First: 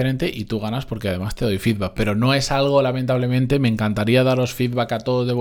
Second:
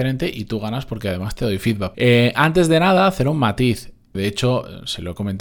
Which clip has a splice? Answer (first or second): second